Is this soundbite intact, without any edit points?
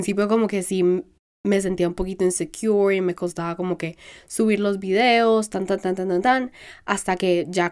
yes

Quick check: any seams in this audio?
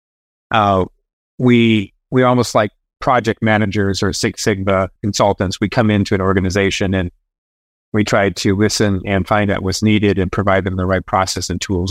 yes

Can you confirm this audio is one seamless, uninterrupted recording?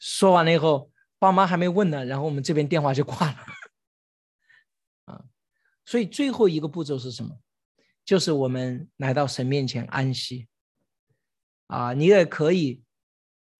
yes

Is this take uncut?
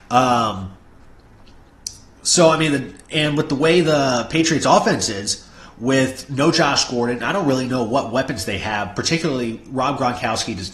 yes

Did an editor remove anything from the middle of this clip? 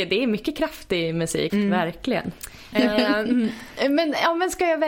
yes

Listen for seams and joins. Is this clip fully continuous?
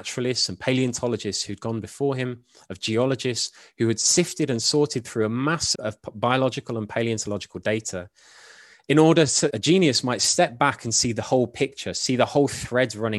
no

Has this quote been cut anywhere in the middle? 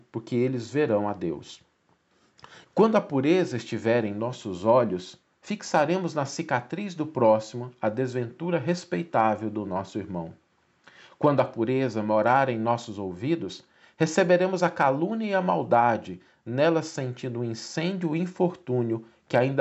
yes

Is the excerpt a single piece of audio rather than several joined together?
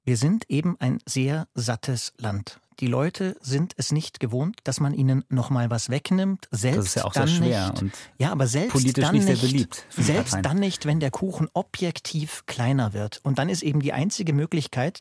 yes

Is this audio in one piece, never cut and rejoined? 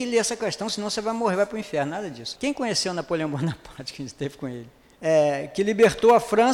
no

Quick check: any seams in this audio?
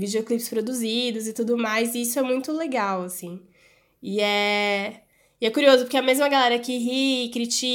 no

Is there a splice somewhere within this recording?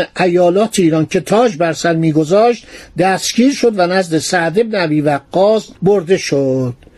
yes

